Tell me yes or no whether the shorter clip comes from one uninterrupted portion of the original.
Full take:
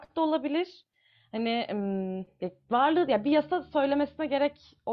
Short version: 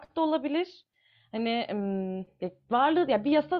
yes